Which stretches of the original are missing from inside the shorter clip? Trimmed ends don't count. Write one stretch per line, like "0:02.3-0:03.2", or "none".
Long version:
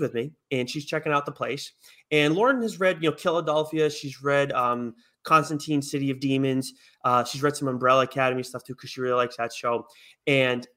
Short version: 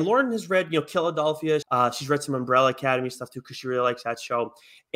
0:03.9-0:07.0